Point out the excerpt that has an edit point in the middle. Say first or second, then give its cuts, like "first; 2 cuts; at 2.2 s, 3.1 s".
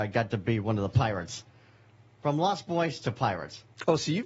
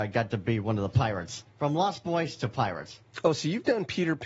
second; 1 cut; at 1.5 s